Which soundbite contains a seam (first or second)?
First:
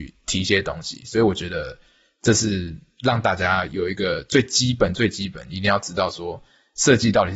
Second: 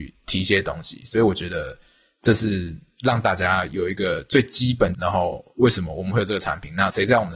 second